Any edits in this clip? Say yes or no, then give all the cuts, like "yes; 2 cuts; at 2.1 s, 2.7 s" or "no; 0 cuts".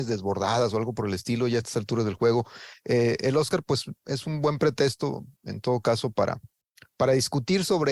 no; 0 cuts